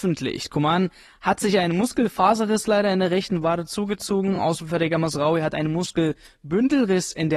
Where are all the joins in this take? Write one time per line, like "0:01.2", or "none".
none